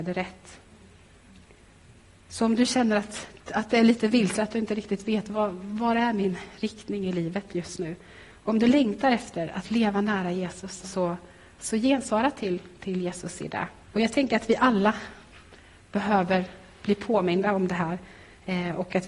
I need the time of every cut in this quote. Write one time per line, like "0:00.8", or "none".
0:10.8
0:13.8

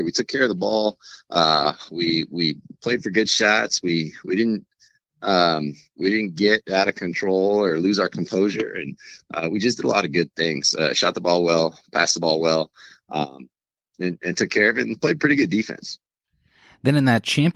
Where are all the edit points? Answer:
none

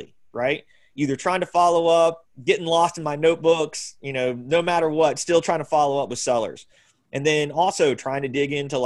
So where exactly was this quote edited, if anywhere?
none

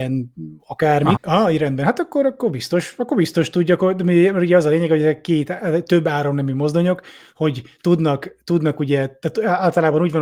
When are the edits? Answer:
0:01.2

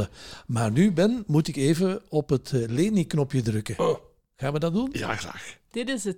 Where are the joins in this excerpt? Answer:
none

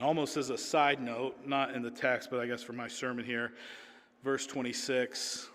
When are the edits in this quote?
none

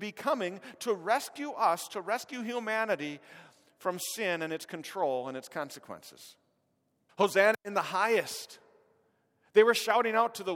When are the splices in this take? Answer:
0:07.1

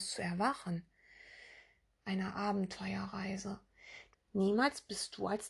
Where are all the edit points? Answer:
0:01.9
0:04.1

